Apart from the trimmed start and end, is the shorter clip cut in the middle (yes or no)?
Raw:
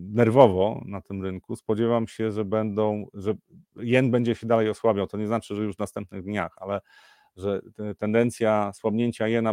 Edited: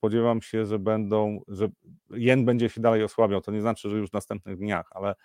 no